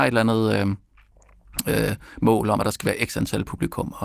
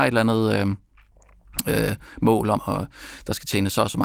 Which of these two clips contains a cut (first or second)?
second